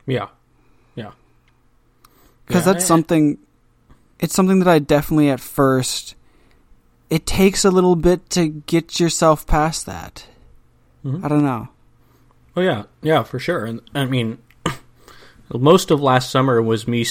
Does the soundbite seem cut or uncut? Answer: uncut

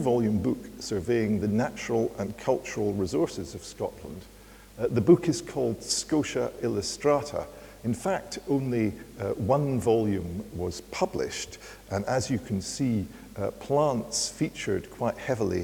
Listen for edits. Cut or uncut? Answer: uncut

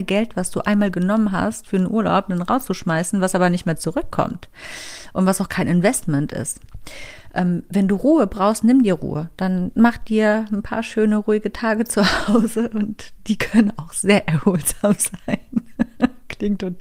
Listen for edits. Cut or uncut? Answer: uncut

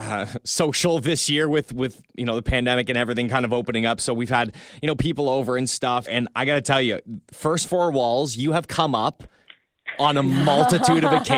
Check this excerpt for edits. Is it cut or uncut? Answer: cut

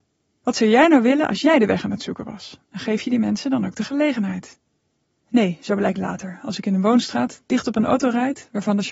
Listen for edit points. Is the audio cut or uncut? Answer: uncut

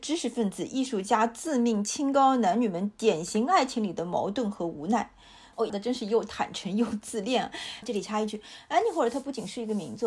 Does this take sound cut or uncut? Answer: cut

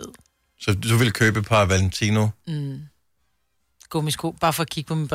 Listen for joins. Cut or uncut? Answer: uncut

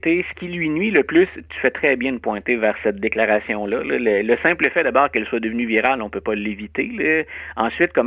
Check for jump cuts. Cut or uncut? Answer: uncut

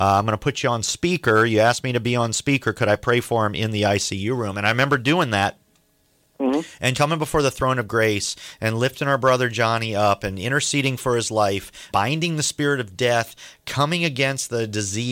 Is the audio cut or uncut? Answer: cut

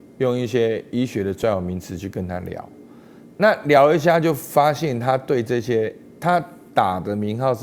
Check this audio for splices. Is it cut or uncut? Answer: uncut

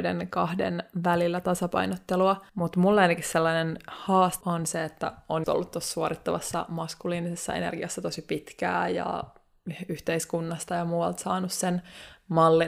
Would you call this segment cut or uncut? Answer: cut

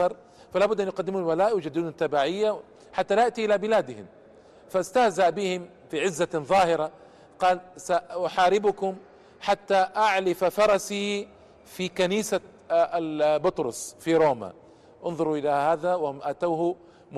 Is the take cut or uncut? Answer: uncut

